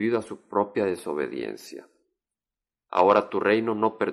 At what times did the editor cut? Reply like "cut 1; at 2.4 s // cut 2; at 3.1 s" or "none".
cut 1; at 2.8 s